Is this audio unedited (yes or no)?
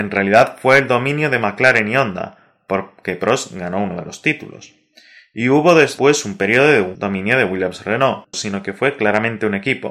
no